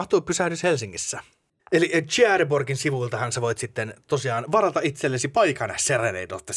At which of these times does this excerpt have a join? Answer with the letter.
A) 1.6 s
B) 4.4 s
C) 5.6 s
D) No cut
A